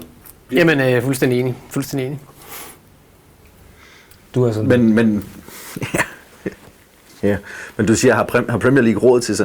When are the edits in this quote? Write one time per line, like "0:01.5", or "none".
none